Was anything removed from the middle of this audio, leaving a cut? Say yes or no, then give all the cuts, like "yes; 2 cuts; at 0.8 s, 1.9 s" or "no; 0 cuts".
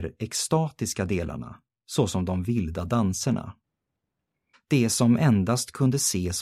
yes; 1 cut; at 4.5 s